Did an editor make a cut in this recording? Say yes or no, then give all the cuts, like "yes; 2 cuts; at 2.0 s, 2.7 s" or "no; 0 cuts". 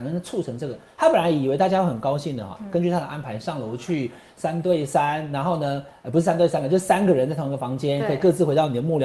no; 0 cuts